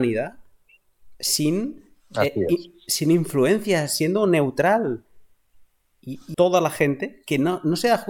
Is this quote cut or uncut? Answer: cut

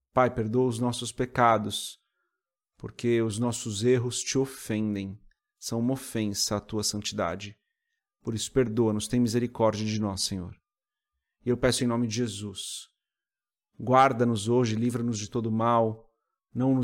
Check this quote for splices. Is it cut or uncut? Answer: uncut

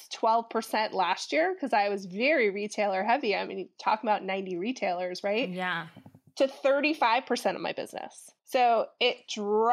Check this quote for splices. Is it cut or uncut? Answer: cut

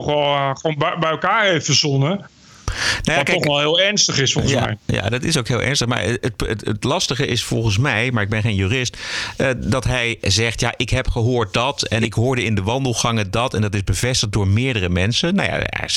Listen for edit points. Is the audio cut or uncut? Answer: uncut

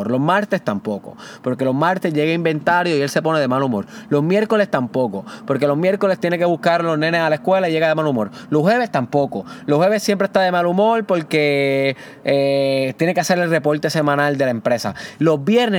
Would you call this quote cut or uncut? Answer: uncut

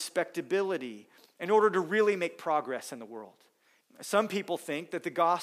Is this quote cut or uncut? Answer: cut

